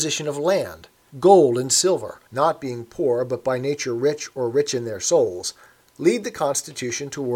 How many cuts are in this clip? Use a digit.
2